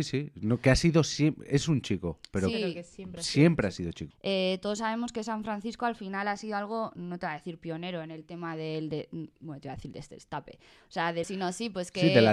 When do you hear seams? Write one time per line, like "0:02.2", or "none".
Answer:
0:04.1
0:11.2